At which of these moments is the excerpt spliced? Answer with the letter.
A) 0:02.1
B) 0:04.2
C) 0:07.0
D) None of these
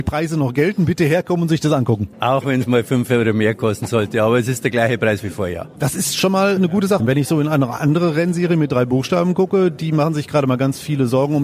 C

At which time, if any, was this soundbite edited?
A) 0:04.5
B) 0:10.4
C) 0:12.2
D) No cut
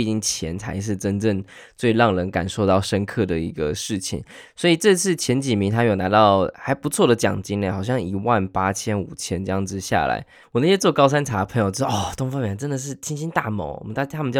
B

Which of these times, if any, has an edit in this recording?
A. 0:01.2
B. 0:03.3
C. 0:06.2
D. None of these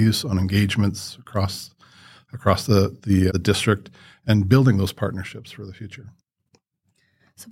B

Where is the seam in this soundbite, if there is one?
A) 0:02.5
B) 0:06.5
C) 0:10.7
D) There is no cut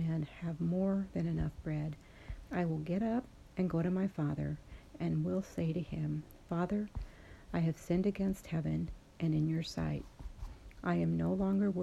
A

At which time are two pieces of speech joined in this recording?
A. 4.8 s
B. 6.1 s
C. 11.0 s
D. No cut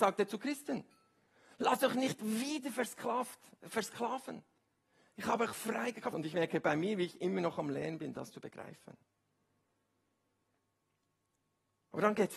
B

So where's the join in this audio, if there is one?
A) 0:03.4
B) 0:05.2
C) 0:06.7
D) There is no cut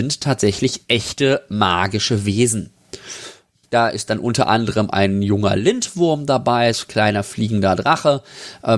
C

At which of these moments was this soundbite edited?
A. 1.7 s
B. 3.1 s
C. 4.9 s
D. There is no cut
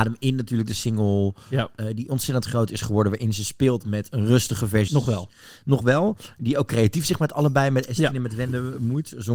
C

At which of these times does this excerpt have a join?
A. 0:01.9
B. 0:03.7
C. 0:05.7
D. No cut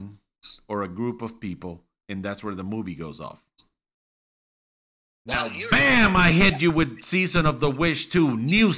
D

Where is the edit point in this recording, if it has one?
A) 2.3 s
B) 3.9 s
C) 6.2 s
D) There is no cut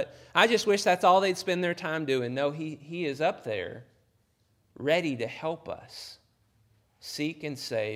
D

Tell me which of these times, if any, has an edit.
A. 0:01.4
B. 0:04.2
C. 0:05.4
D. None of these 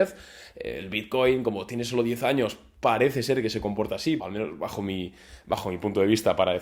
B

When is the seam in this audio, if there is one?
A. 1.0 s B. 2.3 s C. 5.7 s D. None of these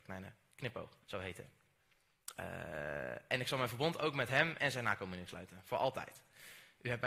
A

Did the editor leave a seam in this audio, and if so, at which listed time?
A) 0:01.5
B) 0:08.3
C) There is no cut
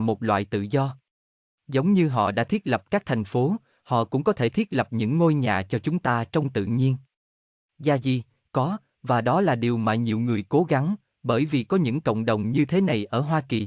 C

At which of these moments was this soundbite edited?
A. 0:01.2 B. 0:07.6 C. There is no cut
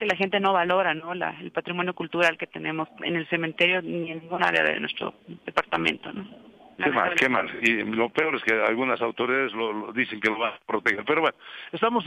C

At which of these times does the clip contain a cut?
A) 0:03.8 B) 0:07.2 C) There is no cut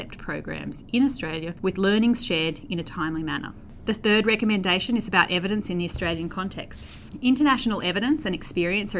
A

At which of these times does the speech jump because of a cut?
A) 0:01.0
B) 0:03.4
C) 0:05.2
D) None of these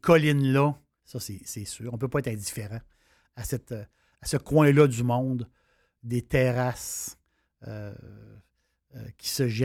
A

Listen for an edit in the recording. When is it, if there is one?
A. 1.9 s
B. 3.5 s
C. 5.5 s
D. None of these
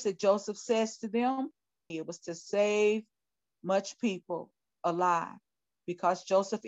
A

